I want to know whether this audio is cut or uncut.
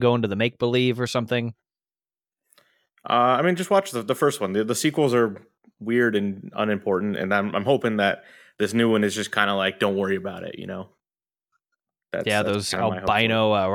uncut